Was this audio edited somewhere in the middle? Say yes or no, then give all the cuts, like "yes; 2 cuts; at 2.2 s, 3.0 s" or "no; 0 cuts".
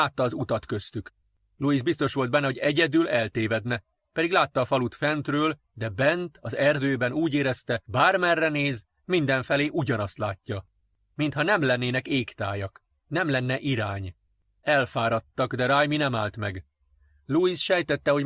yes; 1 cut; at 5.6 s